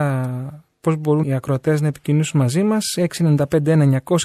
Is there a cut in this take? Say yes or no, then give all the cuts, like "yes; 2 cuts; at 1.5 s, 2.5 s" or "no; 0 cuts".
yes; 1 cut; at 1.2 s